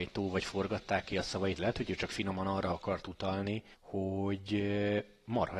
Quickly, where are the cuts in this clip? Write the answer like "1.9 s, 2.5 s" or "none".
3.7 s